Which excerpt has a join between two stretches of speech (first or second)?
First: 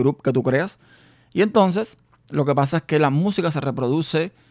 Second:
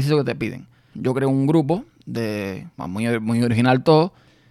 second